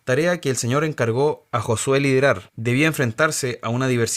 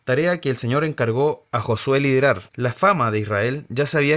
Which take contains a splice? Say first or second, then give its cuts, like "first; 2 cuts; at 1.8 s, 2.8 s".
second; 1 cut; at 2.5 s